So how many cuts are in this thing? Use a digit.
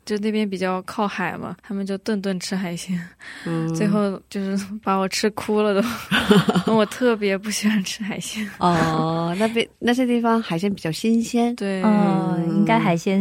1